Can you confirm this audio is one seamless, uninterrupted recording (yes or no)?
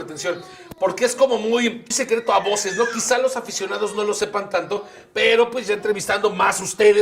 no